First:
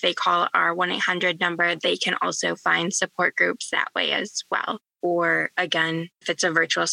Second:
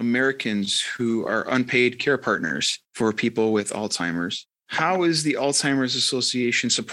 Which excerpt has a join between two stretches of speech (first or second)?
first